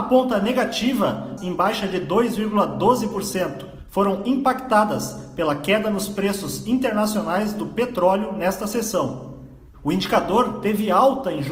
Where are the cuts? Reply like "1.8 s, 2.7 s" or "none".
1.4 s, 9.7 s